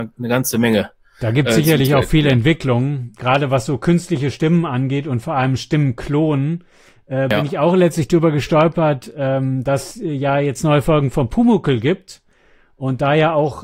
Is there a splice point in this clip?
no; 0 cuts

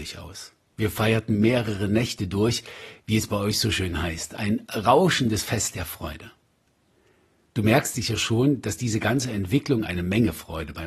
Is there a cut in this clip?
no; 0 cuts

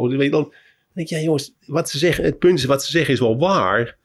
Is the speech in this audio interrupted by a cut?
no; 0 cuts

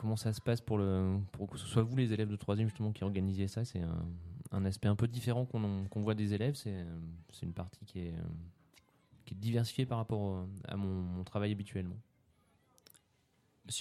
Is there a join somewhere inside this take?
no; 0 cuts

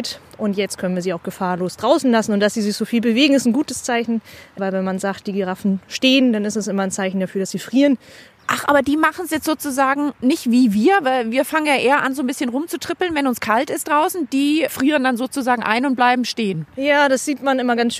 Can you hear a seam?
no; 0 cuts

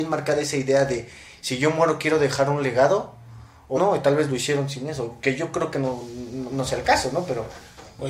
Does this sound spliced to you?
yes; 1 cut; at 3.7 s

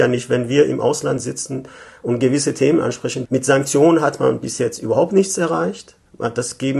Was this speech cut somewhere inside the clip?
yes; 1 cut; at 3.2 s

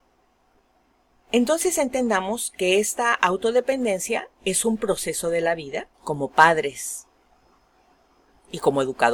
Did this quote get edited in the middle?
yes; 2 cuts; at 4.3 s, 5.9 s

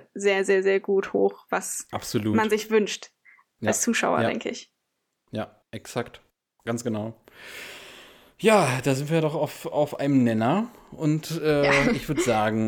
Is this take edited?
no; 0 cuts

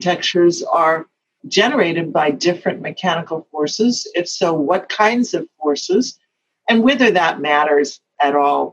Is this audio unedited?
yes; 0 cuts

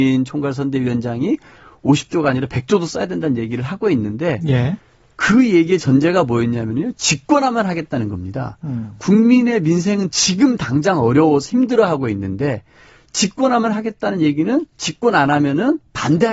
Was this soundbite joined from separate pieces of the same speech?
no; 0 cuts

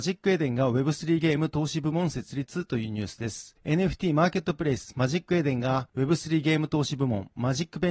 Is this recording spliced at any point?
no; 0 cuts

